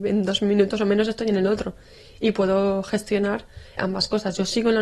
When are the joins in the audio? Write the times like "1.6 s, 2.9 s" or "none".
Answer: 3.8 s